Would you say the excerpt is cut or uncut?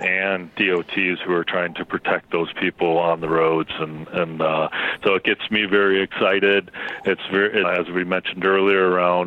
cut